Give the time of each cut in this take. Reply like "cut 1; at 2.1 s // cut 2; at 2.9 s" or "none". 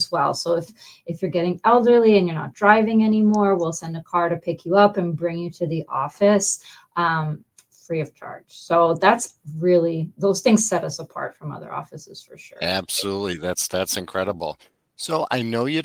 none